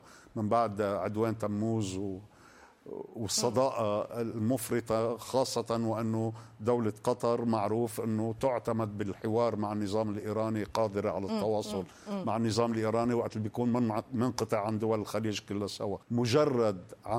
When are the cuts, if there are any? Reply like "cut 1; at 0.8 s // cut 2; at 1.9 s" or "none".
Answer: cut 1; at 16.0 s